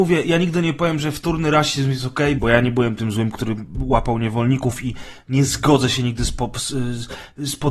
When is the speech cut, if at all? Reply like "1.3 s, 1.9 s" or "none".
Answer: 2.4 s